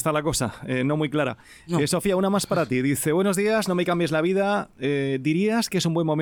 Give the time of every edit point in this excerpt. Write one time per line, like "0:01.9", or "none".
none